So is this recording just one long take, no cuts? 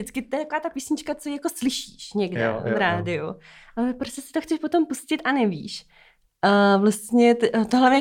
yes; 0 cuts

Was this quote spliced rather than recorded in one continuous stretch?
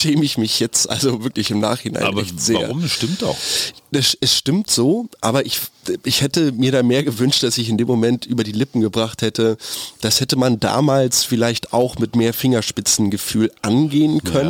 no; 0 cuts

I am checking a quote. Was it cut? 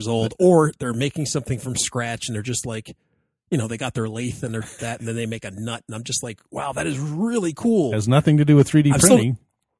yes; 1 cut; at 4.8 s

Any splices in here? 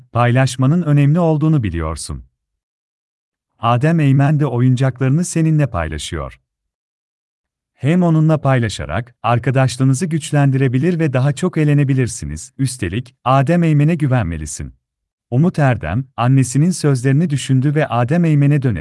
yes; 2 cuts; at 12.6 s, 15.2 s

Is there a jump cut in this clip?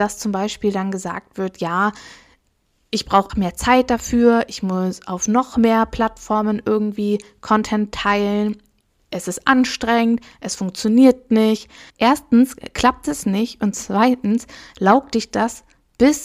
yes; 2 cuts; at 3.3 s, 11.9 s

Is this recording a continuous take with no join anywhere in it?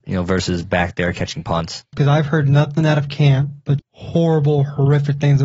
no; 2 cuts; at 1.9 s, 3.8 s

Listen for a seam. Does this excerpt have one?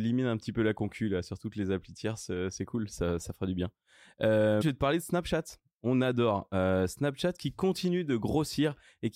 yes; 1 cut; at 4.6 s

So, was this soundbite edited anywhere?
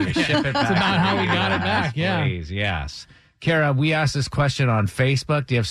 no; 0 cuts

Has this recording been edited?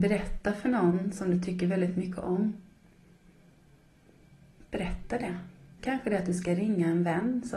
yes; 1 cut; at 5.8 s

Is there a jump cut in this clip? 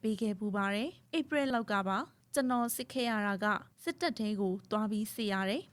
yes; 1 cut; at 1.5 s

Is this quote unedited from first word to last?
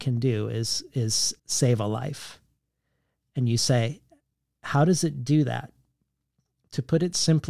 no; 1 cut; at 1.4 s

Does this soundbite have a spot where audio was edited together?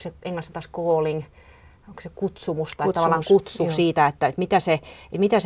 no; 0 cuts

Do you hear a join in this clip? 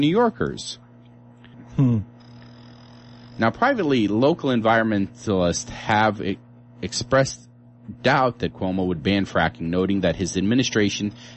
yes; 1 cut; at 1.5 s

